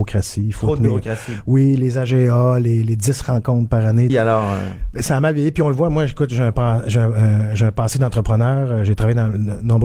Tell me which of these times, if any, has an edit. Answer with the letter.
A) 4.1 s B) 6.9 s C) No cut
A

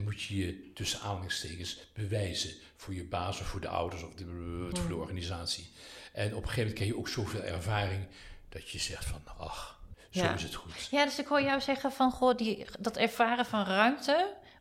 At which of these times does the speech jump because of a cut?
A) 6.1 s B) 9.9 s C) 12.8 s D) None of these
B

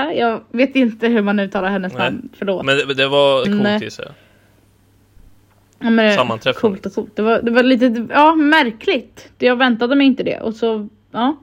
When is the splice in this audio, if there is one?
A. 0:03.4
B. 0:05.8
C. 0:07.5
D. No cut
A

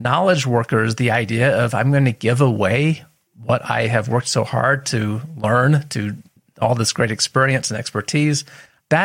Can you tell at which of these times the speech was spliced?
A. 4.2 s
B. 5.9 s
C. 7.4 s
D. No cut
D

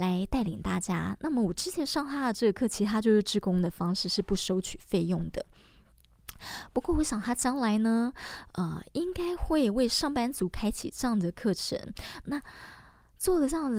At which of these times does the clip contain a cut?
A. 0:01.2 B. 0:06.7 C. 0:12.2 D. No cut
C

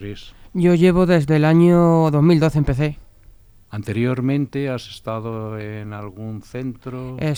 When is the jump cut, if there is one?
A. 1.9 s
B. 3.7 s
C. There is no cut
B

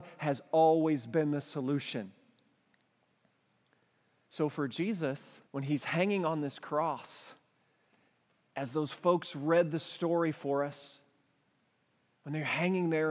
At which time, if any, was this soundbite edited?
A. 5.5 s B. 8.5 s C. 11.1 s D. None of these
A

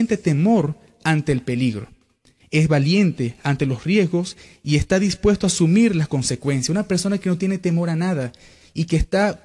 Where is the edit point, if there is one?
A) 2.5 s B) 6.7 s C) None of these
C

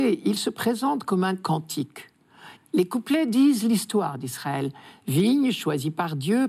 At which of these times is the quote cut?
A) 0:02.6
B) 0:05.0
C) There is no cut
A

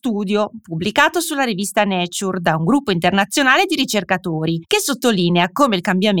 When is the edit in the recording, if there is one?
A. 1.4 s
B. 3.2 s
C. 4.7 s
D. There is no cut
C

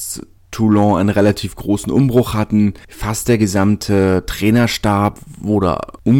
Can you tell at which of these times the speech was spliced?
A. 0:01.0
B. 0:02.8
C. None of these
C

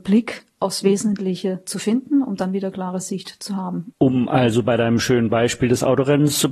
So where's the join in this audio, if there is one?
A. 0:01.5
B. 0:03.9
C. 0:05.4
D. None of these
B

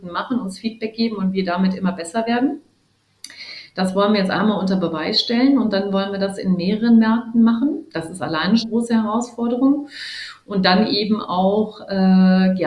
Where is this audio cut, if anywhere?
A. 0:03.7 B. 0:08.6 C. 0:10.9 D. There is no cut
B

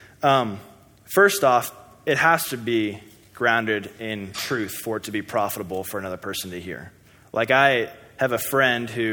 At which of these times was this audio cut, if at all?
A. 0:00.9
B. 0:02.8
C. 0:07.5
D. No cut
D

